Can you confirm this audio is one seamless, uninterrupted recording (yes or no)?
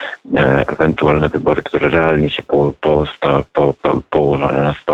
no